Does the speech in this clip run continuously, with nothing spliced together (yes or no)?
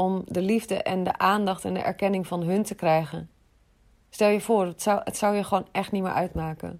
yes